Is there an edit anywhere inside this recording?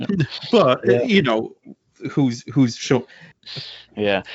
yes; 1 cut; at 3.3 s

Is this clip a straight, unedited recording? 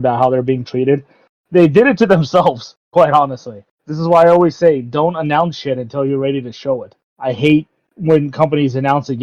yes; 0 cuts

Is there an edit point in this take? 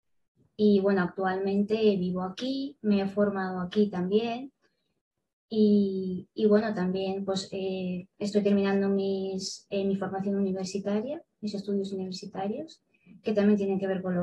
no; 0 cuts

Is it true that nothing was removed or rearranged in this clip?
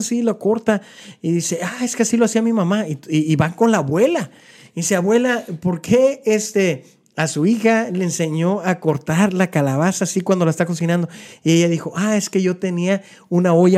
yes; 0 cuts

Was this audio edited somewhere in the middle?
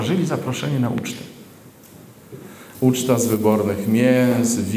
yes; 1 cut; at 2.7 s

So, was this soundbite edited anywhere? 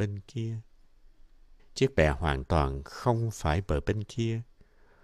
yes; 1 cut; at 1.6 s

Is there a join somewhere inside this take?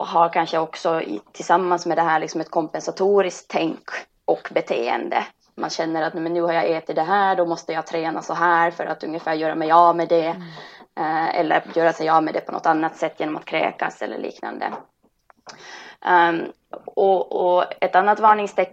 no; 0 cuts

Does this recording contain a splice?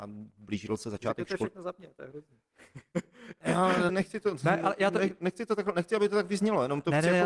yes; 1 cut; at 3.9 s

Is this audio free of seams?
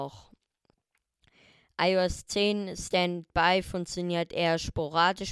yes; 0 cuts

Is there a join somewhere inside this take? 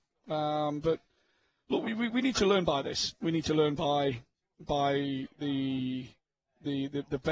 no; 0 cuts

